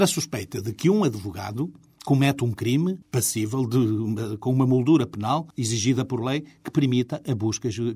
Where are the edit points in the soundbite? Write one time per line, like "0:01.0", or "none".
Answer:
0:03.0
0:05.5